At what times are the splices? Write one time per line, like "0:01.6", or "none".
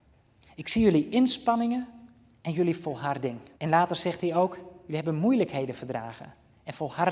0:03.6